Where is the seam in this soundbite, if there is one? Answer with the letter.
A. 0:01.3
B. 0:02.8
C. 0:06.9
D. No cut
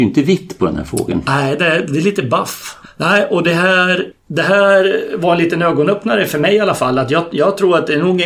B